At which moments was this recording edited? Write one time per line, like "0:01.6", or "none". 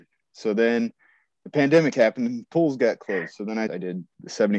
0:03.7